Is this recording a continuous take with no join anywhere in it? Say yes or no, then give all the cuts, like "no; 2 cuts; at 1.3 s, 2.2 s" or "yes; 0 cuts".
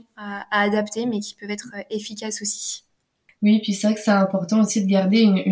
yes; 0 cuts